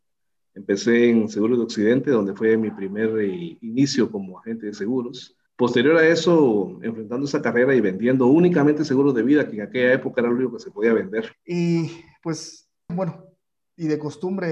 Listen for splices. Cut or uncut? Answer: cut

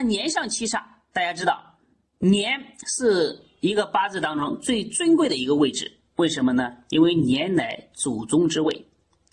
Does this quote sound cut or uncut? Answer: uncut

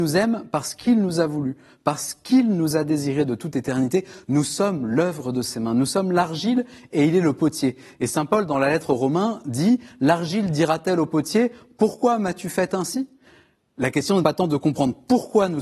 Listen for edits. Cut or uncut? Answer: cut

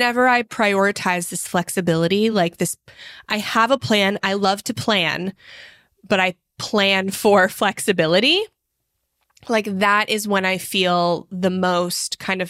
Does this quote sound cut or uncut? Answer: uncut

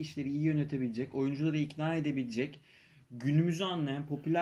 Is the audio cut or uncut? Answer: uncut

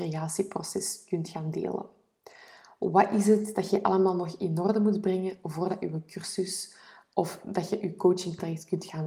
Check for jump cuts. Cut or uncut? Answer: uncut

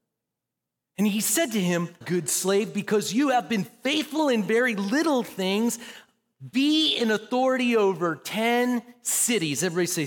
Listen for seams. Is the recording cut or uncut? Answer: cut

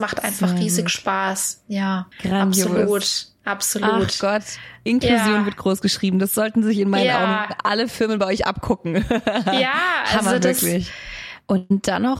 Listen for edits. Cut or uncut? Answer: cut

